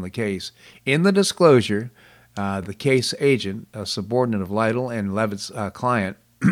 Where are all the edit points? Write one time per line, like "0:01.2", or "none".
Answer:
none